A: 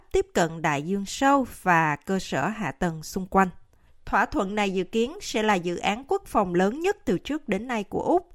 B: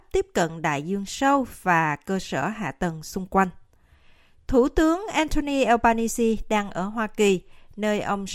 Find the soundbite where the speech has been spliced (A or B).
A